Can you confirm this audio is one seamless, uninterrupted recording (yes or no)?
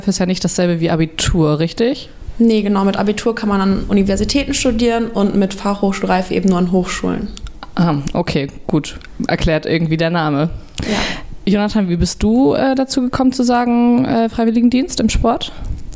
yes